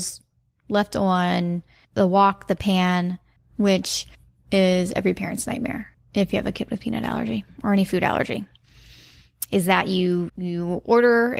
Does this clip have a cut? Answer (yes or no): yes